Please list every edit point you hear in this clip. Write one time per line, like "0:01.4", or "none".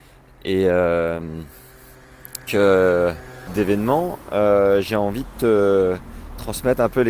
0:02.5
0:03.5

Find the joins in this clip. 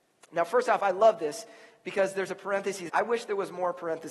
0:02.9

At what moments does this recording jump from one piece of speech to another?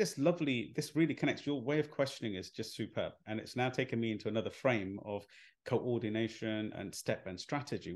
0:06.7

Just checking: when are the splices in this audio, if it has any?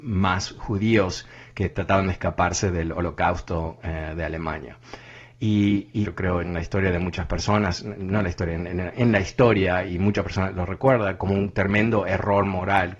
0:06.0

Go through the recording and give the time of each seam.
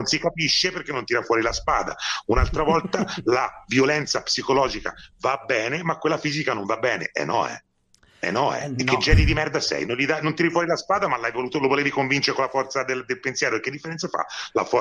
none

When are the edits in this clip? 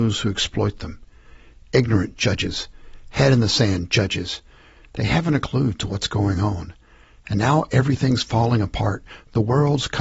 none

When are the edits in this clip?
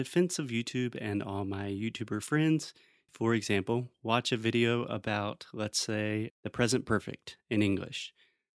0:03.1
0:06.3

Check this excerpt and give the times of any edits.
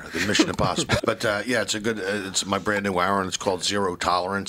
0:01.0

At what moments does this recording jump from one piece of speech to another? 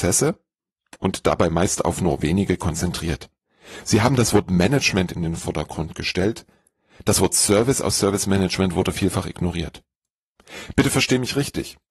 none

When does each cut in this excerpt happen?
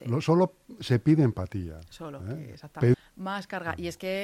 0:02.9

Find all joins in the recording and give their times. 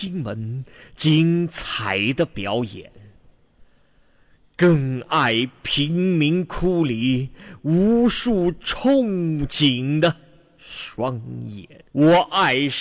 0:11.9

